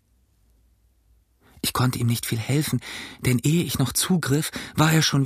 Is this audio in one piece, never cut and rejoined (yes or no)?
yes